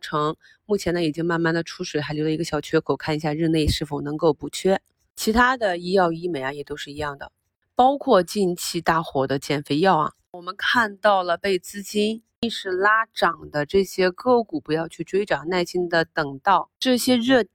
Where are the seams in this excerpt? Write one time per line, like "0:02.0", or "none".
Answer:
none

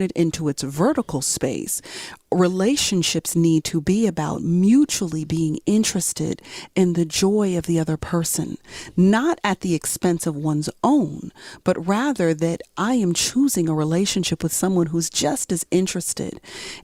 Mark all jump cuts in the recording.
none

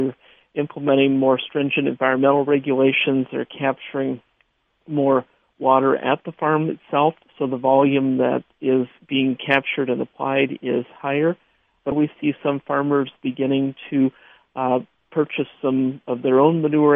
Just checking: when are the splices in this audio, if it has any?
0:11.9

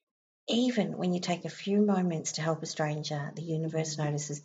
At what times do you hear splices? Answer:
none

